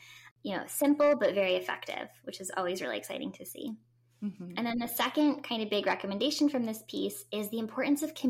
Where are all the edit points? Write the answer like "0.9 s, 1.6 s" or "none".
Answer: none